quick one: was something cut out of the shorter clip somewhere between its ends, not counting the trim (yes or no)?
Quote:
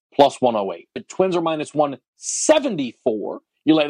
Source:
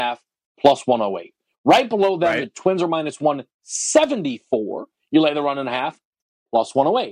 yes